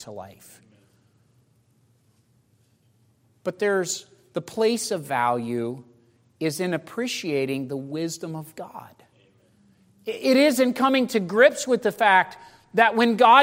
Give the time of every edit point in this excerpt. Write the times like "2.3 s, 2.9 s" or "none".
none